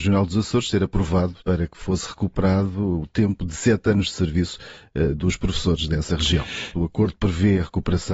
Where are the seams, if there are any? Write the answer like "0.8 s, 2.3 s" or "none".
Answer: 1.4 s, 6.7 s